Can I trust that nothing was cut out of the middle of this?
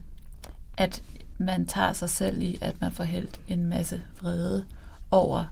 no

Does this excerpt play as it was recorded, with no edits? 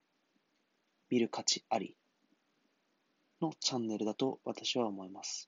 no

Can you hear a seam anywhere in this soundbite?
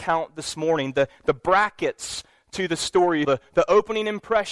yes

